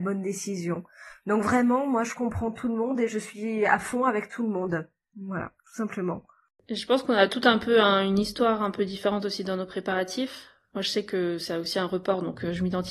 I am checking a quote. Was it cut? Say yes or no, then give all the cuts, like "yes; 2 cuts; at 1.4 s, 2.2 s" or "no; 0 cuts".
no; 0 cuts